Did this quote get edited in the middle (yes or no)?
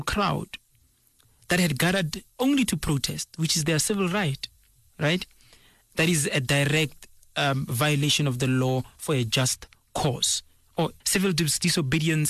yes